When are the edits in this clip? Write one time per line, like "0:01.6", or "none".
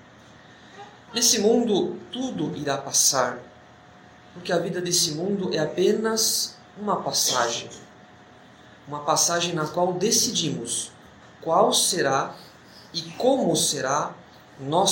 none